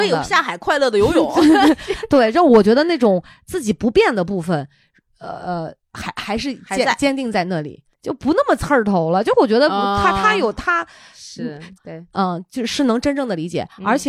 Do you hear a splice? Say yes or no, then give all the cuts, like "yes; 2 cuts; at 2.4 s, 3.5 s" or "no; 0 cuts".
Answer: yes; 2 cuts; at 7.9 s, 11.7 s